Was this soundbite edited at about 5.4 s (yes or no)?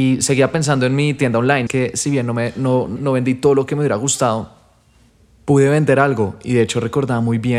no